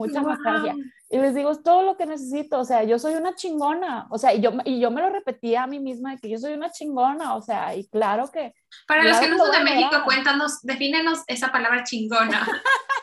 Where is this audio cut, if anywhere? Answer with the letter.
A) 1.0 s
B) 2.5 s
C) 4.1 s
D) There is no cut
A